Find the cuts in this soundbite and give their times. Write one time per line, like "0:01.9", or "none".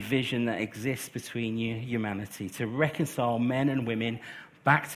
none